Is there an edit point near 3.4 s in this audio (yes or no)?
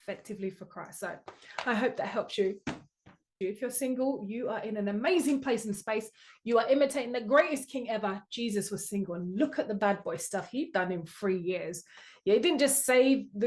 yes